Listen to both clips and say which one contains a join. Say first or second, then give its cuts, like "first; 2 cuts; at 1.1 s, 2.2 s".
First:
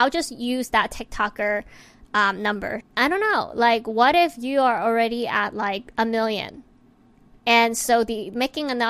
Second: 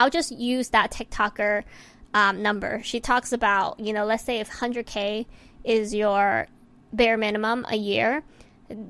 first; 2 cuts; at 2.8 s, 7.3 s